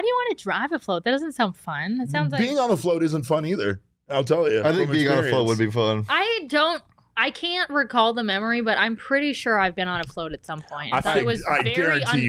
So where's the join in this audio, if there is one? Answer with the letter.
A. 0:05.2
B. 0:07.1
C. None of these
C